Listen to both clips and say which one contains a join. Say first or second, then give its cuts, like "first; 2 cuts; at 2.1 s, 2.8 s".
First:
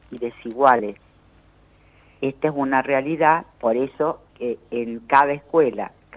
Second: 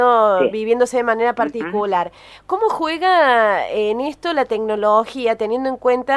first; 1 cut; at 4.3 s